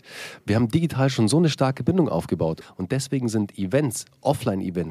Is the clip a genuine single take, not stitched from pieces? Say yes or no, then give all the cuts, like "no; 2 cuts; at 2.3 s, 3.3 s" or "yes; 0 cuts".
no; 1 cut; at 2.6 s